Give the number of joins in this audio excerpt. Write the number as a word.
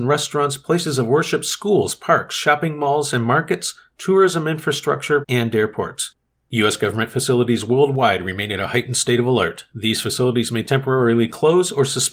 one